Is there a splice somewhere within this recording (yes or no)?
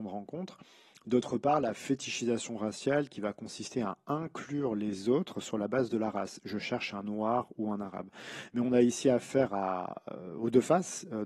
no